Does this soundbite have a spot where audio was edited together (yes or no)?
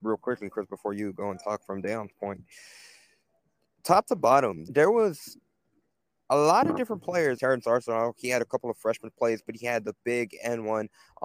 yes